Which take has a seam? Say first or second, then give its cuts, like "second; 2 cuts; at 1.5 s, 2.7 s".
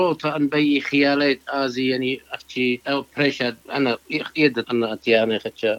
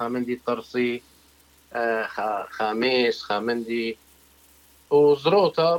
first; 2 cuts; at 3.6 s, 4.6 s